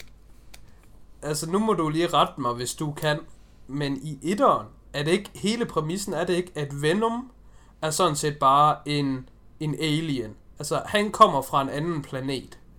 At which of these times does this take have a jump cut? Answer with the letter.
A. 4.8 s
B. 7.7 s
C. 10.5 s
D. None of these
D